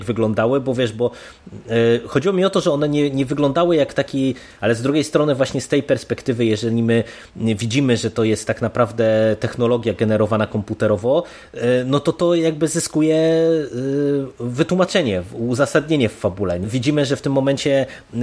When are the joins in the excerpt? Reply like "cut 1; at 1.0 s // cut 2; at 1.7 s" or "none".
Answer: cut 1; at 4.6 s // cut 2; at 16.6 s